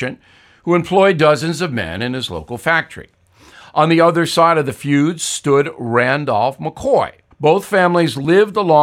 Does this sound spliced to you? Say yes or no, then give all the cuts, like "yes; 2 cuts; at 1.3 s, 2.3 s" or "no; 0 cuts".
yes; 1 cut; at 7.3 s